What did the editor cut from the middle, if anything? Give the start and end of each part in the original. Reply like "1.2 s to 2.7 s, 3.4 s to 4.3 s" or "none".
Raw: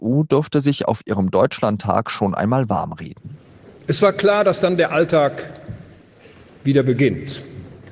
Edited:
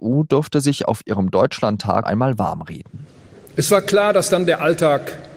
2.0 s to 2.3 s